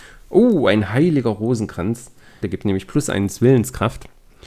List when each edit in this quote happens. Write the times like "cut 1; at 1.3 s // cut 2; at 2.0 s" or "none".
cut 1; at 2.4 s